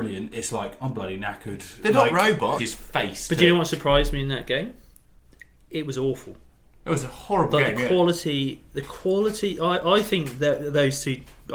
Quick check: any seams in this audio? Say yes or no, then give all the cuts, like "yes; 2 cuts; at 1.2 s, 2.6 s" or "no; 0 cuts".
yes; 1 cut; at 2.6 s